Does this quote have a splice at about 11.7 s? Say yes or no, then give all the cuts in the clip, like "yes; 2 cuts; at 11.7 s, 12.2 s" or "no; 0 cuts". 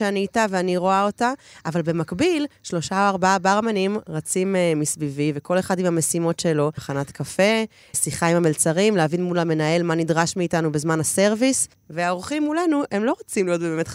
yes; 2 cuts; at 6.8 s, 11.7 s